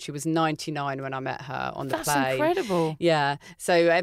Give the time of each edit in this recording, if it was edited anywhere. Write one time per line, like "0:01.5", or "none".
none